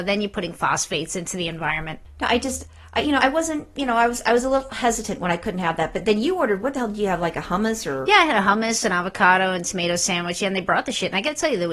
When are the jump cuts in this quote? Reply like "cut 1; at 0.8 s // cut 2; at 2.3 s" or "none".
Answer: cut 1; at 3.2 s